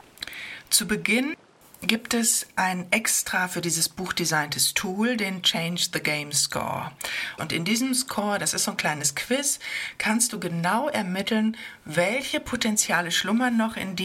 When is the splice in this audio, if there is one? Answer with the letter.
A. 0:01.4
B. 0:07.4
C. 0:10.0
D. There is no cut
B